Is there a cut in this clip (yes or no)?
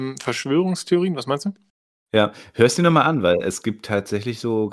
no